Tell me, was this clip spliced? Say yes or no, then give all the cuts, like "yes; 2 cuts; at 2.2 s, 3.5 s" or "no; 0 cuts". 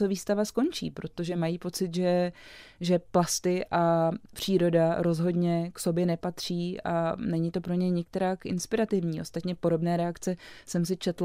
no; 0 cuts